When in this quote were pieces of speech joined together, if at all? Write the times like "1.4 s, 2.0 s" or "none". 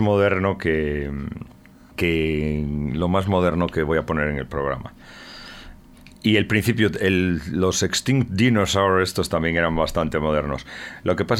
none